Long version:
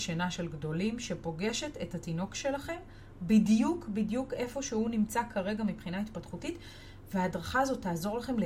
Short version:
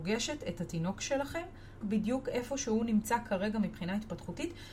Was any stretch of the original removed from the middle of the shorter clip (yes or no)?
yes